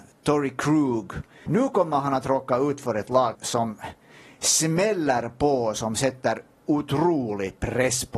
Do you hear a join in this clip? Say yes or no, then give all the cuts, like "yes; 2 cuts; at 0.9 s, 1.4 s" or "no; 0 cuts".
yes; 2 cuts; at 1.5 s, 3.3 s